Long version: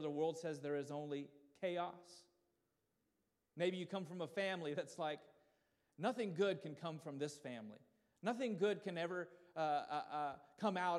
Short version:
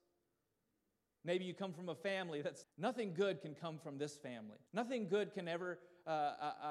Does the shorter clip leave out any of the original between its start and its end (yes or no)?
yes